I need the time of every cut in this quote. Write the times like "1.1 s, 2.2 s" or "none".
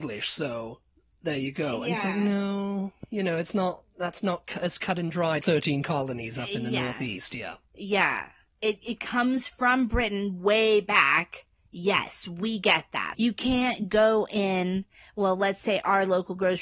5.4 s, 13.1 s